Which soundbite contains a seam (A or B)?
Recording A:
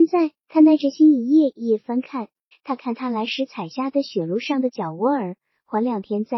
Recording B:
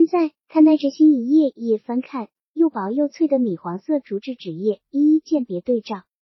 A